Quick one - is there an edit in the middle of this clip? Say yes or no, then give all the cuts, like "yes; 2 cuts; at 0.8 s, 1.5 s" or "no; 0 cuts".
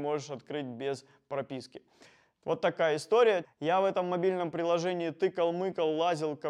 yes; 1 cut; at 3.4 s